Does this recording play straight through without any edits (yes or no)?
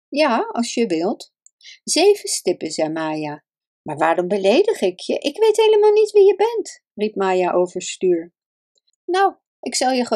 no